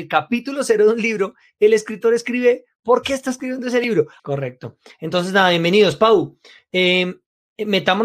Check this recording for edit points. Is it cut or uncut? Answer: cut